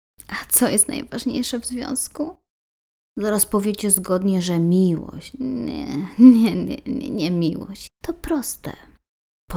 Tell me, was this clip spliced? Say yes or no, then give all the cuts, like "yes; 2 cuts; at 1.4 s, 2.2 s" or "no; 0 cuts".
yes; 1 cut; at 7.9 s